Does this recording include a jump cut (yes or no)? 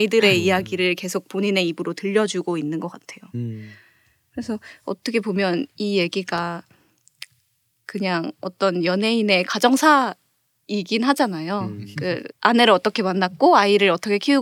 yes